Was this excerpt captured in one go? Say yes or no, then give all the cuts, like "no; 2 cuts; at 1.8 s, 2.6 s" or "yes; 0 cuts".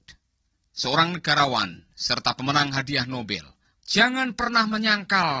no; 1 cut; at 3.7 s